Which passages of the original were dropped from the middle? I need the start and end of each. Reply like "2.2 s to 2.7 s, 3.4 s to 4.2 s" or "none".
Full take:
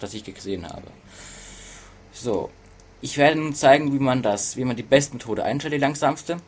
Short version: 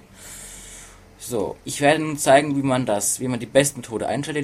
2.5 s to 3.0 s